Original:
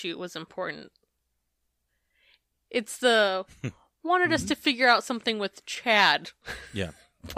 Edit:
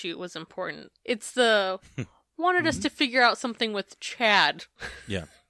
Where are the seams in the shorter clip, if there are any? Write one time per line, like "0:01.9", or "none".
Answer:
0:01.0

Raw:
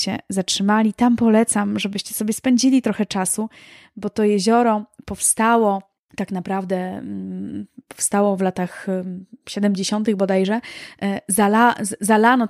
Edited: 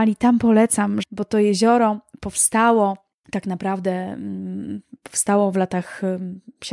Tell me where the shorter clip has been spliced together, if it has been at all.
0:01.0

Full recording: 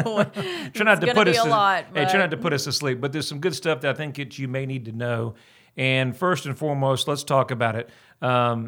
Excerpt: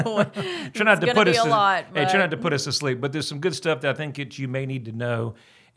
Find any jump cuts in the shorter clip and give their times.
none

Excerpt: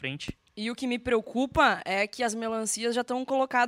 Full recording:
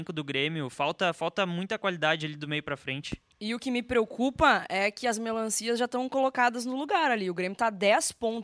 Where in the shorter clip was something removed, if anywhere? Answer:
none

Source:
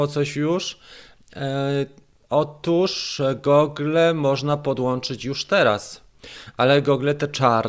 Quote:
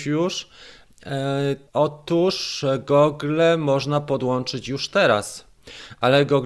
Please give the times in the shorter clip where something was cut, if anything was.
0:01.7

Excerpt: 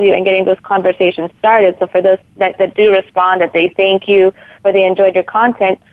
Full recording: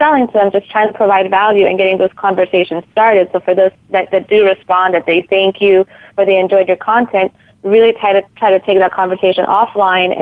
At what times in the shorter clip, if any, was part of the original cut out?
none

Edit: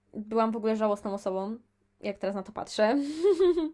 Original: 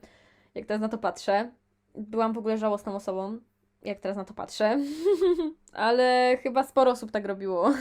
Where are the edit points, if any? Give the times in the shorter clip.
none

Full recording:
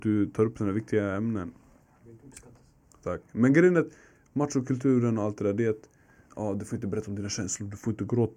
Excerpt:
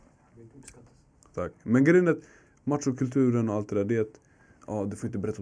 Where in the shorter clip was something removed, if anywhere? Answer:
none

